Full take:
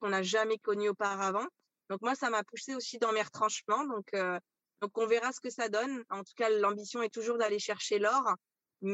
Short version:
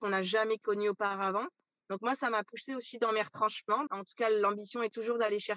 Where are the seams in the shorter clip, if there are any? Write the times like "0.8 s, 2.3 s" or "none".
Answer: 3.9 s